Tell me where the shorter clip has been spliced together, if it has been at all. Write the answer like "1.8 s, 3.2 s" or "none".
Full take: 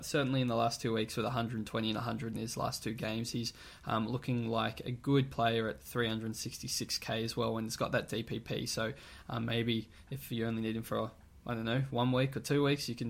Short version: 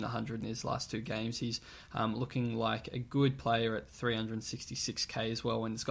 none